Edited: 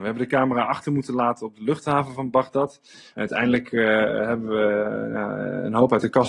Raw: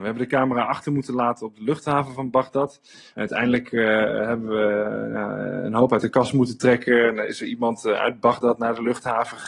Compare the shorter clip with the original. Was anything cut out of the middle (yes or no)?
no